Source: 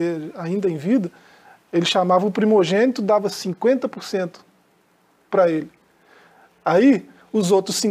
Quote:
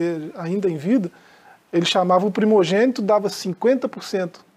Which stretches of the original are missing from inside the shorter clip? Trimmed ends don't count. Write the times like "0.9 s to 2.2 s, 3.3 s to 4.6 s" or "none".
none